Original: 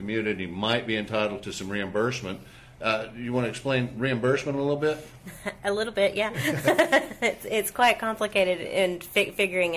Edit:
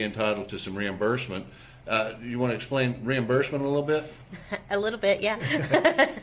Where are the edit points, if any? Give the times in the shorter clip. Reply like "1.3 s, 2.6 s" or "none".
none